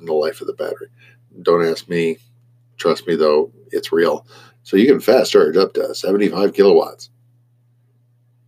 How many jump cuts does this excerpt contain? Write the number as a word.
two